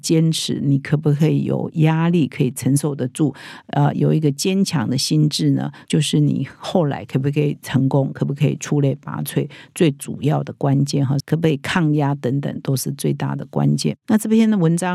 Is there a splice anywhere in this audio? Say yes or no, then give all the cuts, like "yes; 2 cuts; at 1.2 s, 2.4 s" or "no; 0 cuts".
yes; 2 cuts; at 5.8 s, 11.2 s